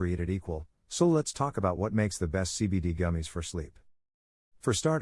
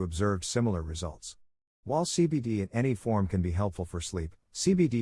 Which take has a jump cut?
second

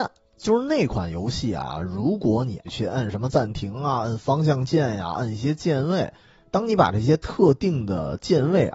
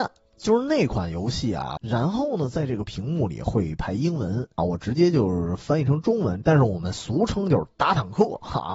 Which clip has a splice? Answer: second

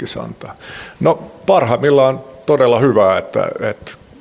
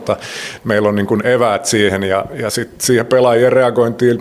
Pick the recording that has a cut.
first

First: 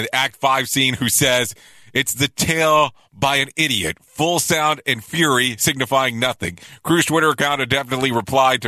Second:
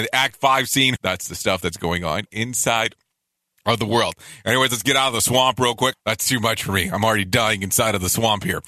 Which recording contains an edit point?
second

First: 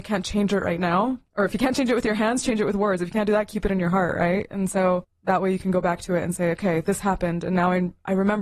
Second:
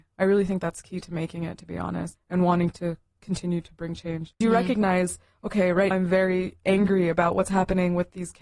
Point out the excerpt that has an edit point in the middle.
second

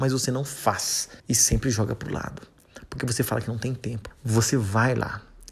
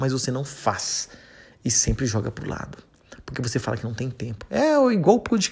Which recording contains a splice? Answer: first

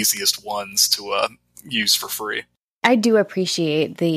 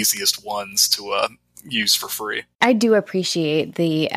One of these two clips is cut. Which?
second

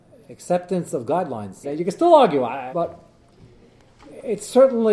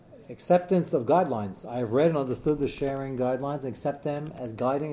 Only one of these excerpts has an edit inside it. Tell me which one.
first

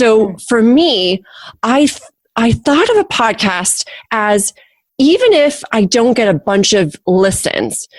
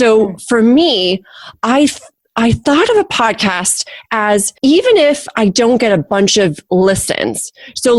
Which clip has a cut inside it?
second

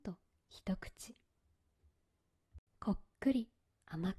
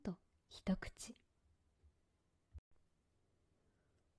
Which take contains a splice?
first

